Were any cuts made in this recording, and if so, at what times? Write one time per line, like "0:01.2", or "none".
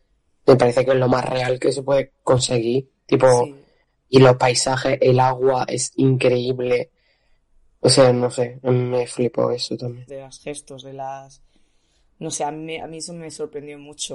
0:10.1
0:12.8